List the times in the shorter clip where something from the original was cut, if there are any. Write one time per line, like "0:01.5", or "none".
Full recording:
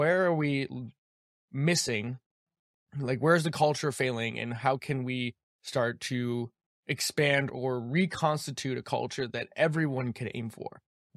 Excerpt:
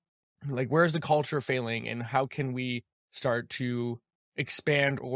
none